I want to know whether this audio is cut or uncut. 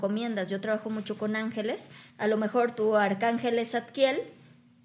cut